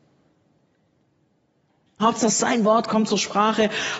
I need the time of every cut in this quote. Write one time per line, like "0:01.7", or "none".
0:02.0